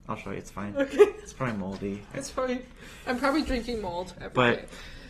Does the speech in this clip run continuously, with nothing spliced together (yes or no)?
yes